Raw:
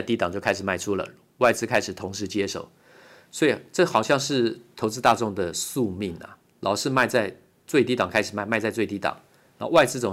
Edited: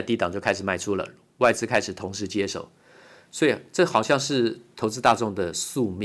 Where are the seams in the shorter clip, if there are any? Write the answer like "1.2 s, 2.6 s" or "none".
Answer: none